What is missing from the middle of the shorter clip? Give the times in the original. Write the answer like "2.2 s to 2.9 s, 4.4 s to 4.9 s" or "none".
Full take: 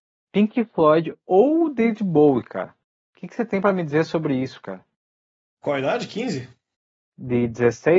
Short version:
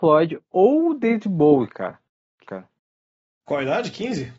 3.2 s to 4.6 s